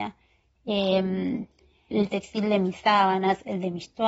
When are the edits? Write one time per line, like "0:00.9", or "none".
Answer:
0:01.9